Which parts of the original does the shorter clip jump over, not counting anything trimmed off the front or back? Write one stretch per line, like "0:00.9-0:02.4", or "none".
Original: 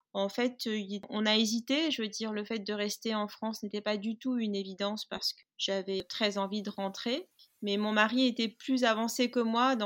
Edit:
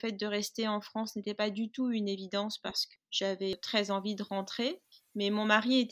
none